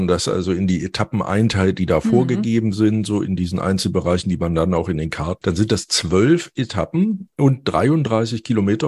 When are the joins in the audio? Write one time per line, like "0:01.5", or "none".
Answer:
0:05.4